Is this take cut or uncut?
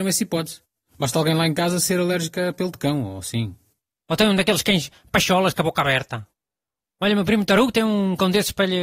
cut